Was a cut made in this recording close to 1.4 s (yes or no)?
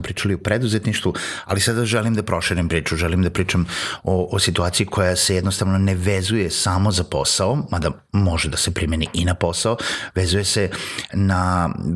no